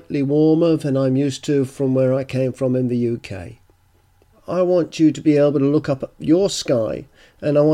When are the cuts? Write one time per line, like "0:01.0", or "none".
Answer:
0:04.3